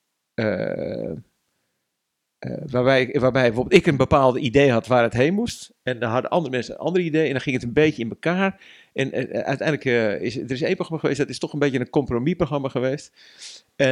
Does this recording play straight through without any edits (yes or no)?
yes